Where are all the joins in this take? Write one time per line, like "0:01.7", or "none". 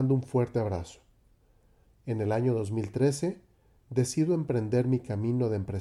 0:01.9